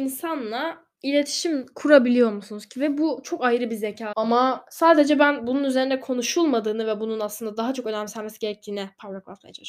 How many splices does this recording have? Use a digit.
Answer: 1